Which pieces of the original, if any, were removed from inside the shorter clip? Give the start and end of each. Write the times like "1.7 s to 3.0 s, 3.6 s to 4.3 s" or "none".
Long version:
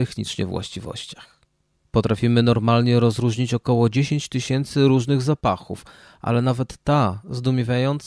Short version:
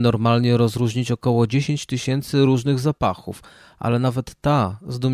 none